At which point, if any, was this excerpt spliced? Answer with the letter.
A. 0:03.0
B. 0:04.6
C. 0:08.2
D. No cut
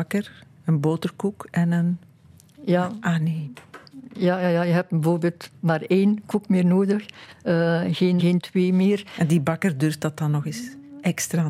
C